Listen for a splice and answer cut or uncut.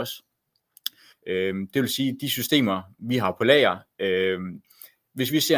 cut